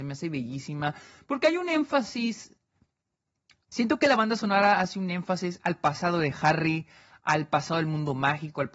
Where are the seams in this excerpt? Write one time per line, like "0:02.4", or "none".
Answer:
none